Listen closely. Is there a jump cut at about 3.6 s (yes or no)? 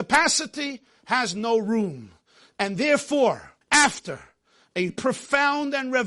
yes